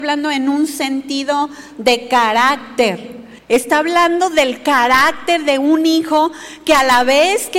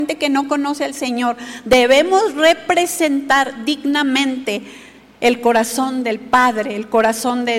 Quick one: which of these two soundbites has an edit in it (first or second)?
first